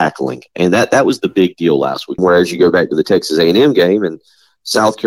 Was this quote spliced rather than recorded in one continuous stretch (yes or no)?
yes